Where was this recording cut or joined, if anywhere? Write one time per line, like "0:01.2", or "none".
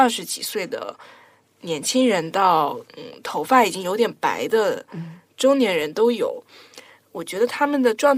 0:02.9

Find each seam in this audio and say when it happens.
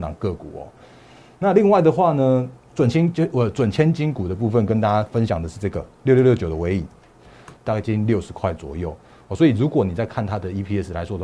0:07.6

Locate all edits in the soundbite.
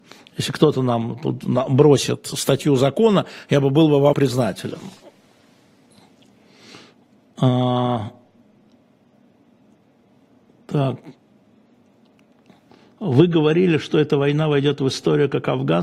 0:04.1

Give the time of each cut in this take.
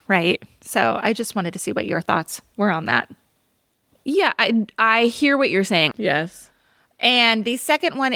0:05.9

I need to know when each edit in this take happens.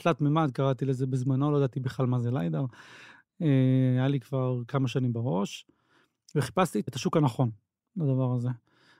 0:06.9

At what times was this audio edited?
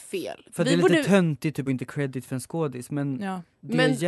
none

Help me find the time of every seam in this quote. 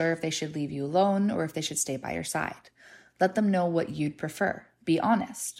none

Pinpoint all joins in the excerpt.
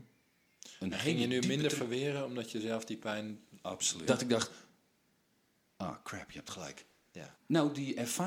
0:04.1
0:07.3

